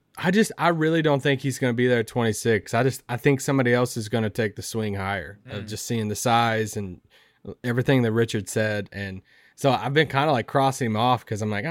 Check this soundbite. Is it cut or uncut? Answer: uncut